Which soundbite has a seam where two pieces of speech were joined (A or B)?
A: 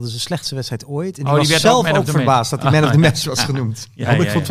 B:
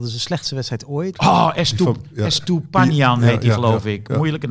B